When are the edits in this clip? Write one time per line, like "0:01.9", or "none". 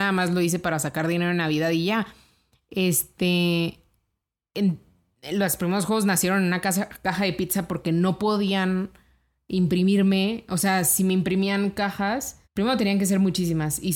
0:12.4